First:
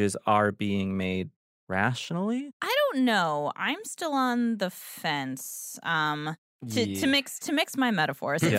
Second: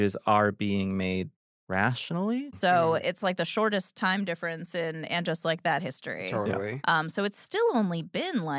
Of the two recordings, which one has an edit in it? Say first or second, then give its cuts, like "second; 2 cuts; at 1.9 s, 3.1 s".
second; 1 cut; at 2.5 s